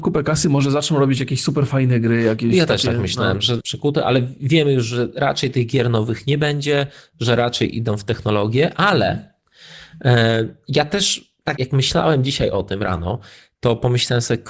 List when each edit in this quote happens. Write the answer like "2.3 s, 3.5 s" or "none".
3.6 s, 11.6 s

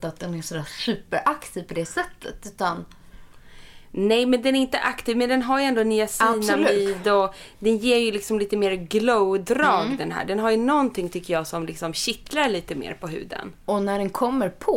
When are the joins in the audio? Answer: none

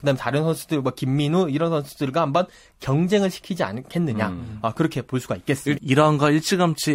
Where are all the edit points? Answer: 5.8 s

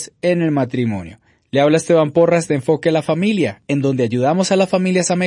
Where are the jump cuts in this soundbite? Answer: none

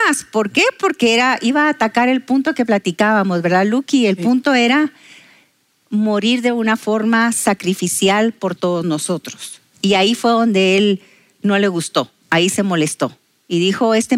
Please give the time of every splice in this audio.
none

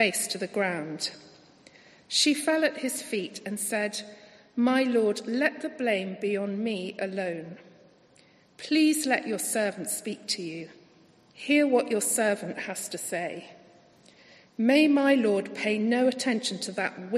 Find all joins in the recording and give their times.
none

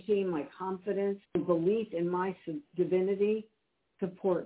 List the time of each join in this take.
1.2 s

